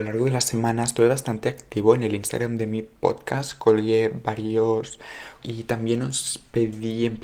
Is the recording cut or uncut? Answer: cut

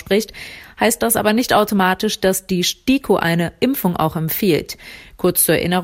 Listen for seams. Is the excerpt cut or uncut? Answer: uncut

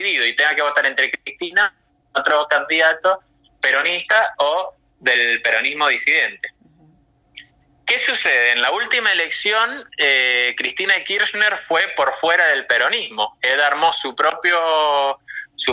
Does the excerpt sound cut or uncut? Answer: uncut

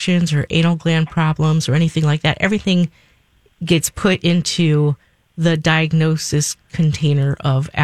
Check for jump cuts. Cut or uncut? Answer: uncut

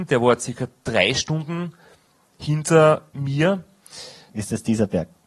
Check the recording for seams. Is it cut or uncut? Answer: cut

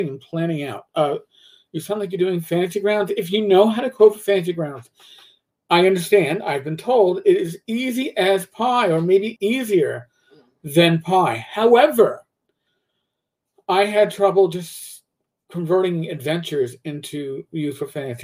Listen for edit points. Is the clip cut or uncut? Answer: cut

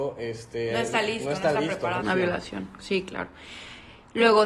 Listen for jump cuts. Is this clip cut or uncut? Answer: cut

